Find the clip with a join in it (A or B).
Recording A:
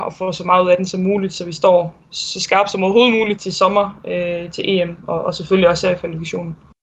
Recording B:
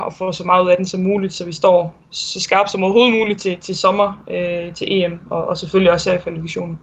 A